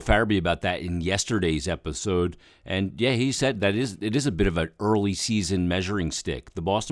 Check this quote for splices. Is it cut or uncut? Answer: uncut